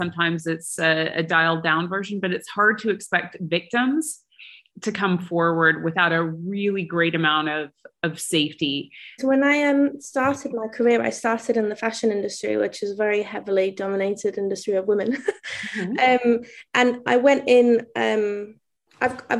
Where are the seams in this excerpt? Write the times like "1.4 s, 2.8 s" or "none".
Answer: 9.2 s